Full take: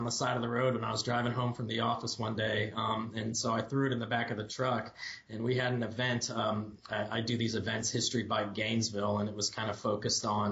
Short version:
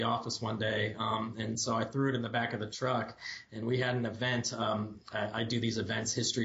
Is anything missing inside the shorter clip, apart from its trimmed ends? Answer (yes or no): no